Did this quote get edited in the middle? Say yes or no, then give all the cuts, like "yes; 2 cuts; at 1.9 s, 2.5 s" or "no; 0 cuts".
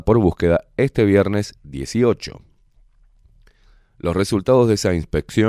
no; 0 cuts